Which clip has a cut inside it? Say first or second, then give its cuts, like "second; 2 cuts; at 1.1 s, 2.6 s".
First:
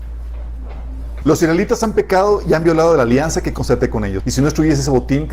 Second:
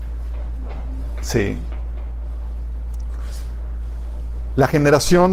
first; 2 cuts; at 1.2 s, 4.2 s